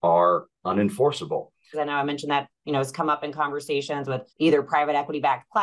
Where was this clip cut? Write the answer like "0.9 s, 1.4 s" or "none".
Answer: 1.7 s, 4.3 s